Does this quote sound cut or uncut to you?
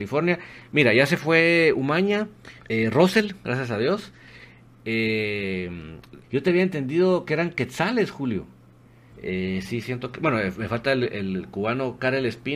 cut